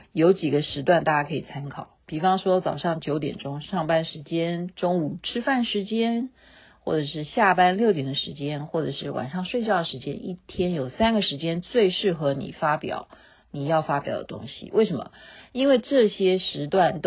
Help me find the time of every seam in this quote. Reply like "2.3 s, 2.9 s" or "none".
none